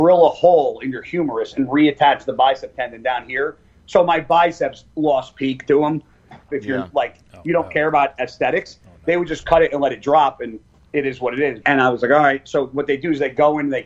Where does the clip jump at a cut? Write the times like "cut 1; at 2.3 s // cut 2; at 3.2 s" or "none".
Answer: cut 1; at 6.5 s // cut 2; at 11.6 s